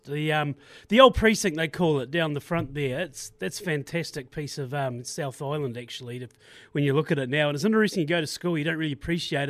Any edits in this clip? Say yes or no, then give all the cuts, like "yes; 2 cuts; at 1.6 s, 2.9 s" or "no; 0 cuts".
no; 0 cuts